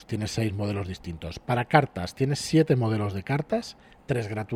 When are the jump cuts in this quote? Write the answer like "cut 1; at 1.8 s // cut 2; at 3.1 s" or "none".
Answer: none